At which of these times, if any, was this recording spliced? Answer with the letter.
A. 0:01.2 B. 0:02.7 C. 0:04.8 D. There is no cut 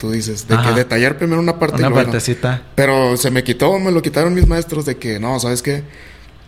D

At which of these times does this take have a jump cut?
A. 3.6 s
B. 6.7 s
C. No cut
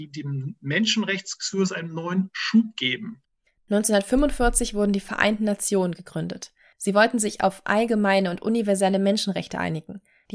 A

